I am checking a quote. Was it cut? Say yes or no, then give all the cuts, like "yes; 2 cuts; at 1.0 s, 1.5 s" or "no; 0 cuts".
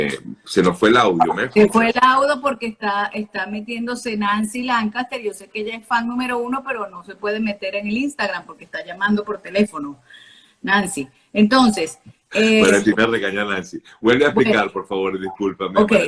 no; 0 cuts